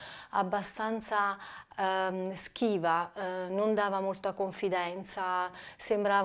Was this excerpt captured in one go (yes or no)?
yes